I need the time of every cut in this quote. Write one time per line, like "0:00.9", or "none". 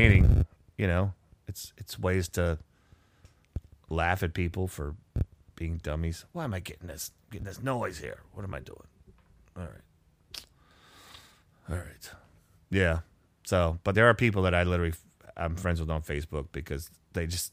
0:13.9